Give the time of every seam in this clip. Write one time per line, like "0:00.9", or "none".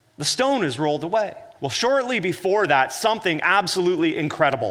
0:01.5